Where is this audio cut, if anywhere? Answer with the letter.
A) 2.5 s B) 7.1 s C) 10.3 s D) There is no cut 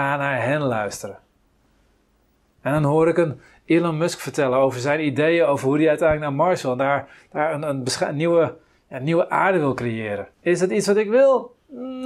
C